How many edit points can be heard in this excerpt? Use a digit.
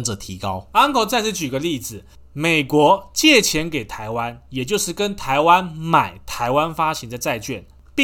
0